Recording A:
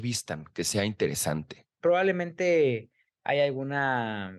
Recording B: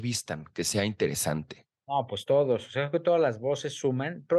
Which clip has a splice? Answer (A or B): A